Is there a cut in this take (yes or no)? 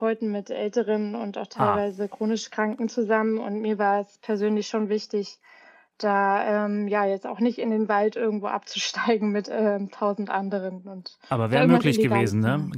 no